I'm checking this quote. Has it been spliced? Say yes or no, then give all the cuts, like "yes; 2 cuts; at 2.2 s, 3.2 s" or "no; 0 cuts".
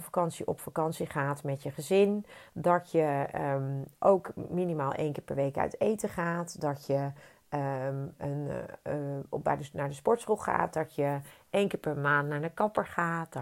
yes; 1 cut; at 2.5 s